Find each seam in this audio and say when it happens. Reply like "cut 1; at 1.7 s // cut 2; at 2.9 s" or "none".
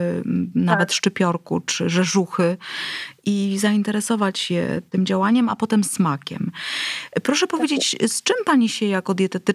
none

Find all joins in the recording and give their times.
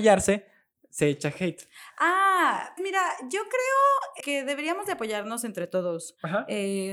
cut 1; at 2.8 s // cut 2; at 4.2 s

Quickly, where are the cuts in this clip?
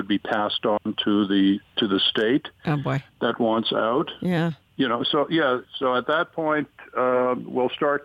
cut 1; at 5.6 s

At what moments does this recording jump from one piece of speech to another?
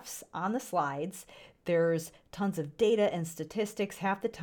none

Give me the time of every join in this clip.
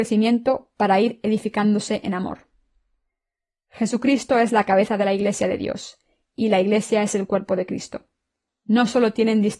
cut 1; at 8.5 s

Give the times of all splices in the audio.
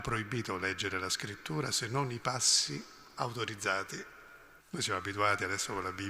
cut 1; at 4.6 s

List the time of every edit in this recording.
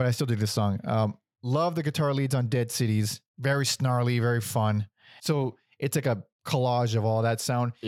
cut 1; at 3.3 s // cut 2; at 5.2 s

